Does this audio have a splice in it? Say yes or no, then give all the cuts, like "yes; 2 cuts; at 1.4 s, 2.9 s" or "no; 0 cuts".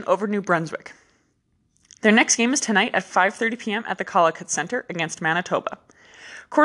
no; 0 cuts